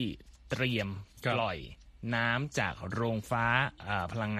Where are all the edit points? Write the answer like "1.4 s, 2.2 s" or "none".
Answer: 3.2 s